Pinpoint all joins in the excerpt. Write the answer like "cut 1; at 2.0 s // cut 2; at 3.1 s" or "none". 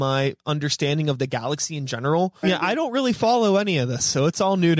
cut 1; at 2.4 s

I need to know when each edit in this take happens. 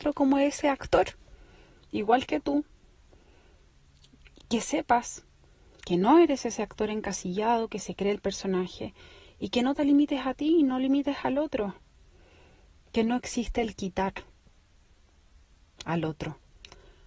cut 1; at 12.8 s

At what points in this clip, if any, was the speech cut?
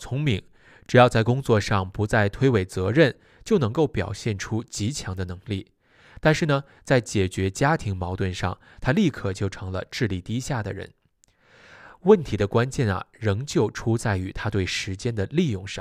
none

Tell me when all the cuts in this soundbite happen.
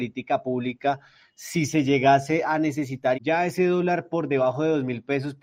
cut 1; at 3.1 s

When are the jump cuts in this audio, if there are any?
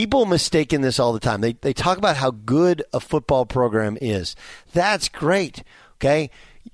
none

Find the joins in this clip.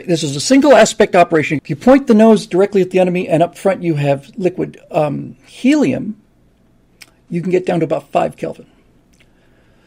cut 1; at 1.6 s

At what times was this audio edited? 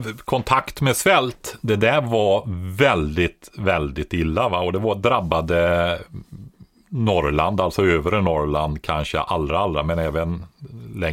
none

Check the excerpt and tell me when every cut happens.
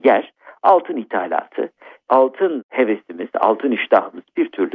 none

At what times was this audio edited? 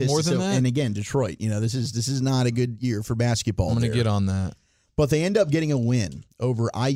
none

